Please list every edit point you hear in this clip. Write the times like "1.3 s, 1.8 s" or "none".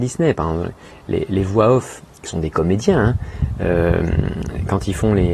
none